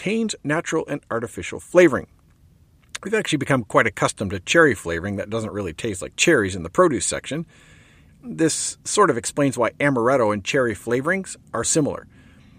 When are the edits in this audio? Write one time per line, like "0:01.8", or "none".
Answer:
0:08.1
0:11.6